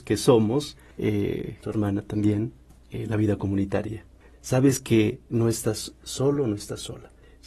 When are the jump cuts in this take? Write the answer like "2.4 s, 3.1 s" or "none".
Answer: 1.6 s, 4.3 s

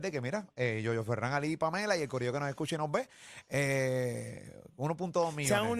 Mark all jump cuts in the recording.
none

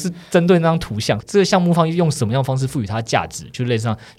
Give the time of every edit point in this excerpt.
1.2 s

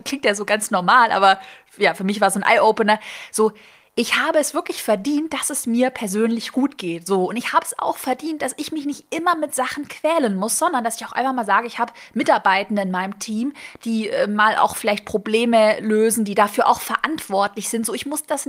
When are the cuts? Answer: none

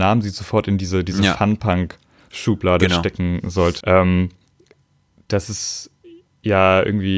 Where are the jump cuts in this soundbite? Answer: 3.8 s

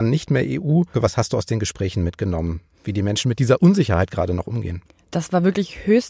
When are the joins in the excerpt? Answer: 0.9 s

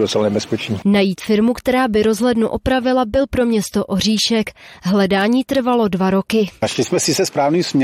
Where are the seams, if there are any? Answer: none

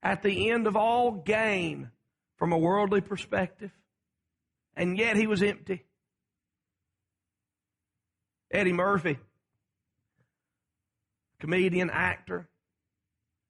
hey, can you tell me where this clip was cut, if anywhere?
4.5 s

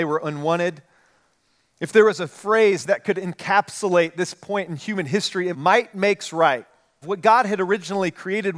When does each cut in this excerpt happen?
5.5 s, 7.0 s

